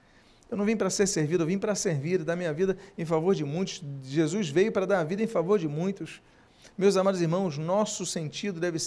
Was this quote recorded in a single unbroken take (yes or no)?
yes